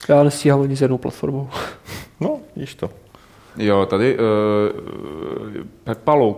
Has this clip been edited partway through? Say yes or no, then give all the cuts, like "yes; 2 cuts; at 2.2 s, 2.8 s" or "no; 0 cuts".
yes; 1 cut; at 3.5 s